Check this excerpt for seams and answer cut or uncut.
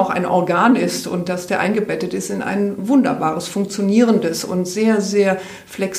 uncut